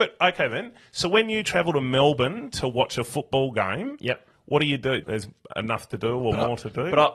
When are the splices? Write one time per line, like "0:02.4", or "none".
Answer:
0:05.0